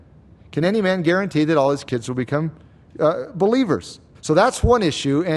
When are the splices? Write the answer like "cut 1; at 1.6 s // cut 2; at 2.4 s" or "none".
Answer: cut 1; at 4.1 s